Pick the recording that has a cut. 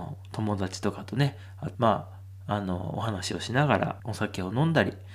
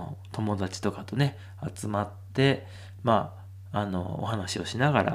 first; 2 cuts; at 1.7 s, 4.0 s

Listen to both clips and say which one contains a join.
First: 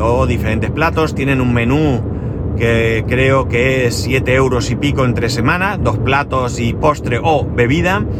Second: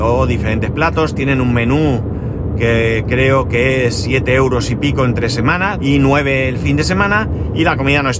second; 1 cut; at 5.8 s

